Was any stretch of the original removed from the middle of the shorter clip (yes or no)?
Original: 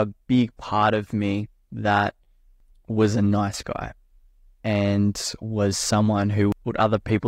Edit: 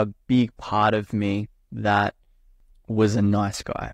no